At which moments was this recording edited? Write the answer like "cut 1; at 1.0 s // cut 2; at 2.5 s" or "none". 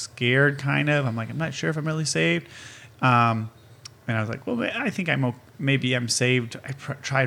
cut 1; at 2.9 s